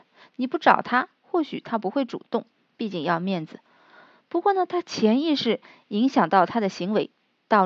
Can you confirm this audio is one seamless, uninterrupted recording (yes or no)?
yes